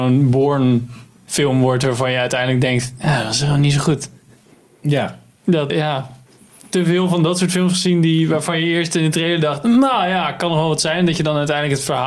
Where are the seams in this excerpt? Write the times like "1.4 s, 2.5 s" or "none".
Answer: 5.7 s